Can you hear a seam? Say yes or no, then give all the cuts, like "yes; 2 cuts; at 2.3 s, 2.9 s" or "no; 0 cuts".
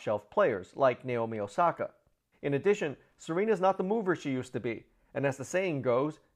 yes; 1 cut; at 2.3 s